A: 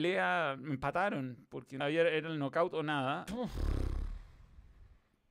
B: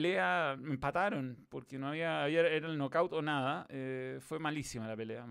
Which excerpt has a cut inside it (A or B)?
A